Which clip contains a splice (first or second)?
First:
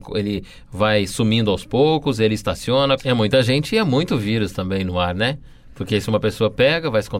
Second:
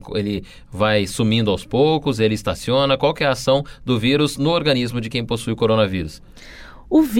first